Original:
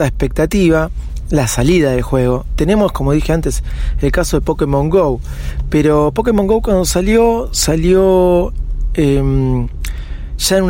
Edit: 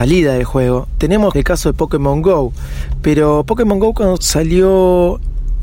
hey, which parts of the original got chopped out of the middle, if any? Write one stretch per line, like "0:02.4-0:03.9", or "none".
0:02.9-0:04.0
0:06.8-0:07.5